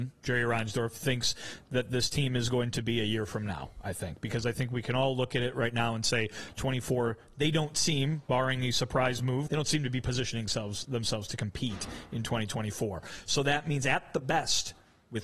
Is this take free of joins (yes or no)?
no